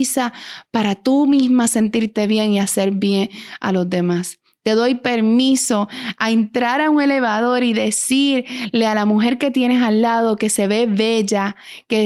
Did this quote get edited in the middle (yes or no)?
no